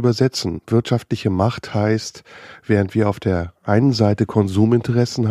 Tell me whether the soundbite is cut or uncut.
uncut